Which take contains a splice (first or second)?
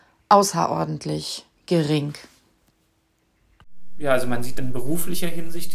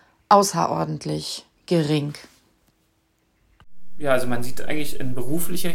first